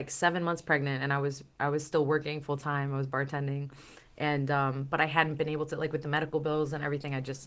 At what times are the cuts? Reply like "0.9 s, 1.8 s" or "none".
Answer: none

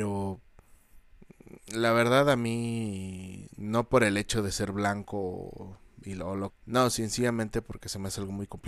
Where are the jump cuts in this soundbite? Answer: 6.5 s

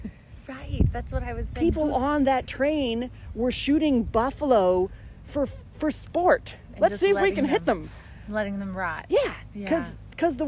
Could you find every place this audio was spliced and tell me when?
none

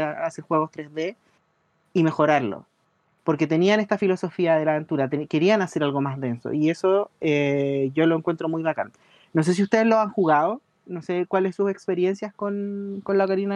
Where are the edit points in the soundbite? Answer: none

